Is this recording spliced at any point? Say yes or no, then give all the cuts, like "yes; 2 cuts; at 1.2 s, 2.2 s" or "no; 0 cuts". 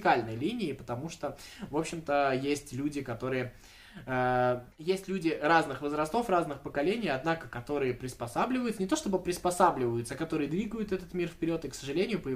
yes; 1 cut; at 4.7 s